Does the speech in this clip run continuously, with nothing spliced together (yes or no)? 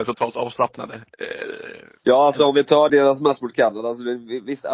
no